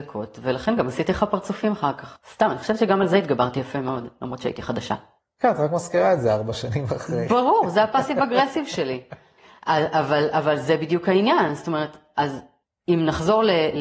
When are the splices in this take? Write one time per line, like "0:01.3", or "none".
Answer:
none